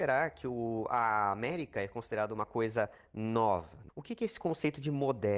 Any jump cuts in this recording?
yes; 1 cut; at 3.9 s

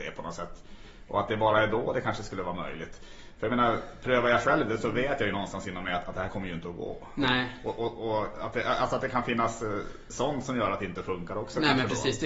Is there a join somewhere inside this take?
no; 0 cuts

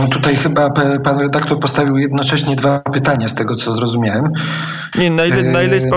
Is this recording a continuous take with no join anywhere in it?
no; 1 cut; at 4.9 s

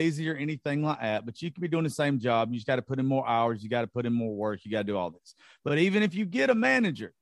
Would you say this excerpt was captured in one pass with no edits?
yes; 0 cuts

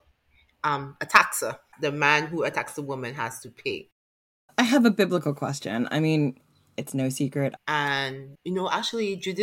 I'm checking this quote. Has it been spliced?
yes; 1 cut; at 7.6 s

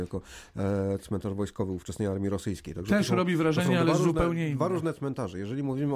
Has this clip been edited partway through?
no; 0 cuts

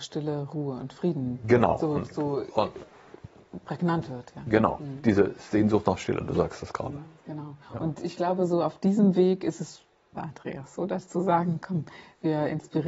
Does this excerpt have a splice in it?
yes; 2 cuts; at 7.6 s, 10.2 s

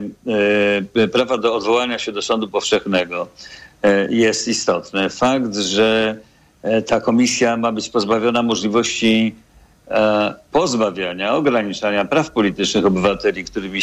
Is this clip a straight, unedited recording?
yes; 0 cuts

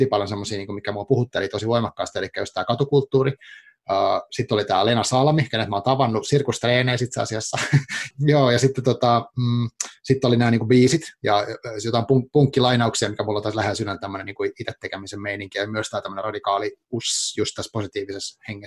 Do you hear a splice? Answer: yes; 1 cut; at 8.1 s

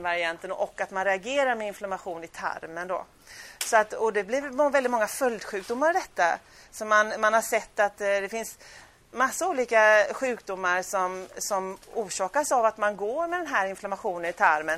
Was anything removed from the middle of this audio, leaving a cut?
no; 0 cuts

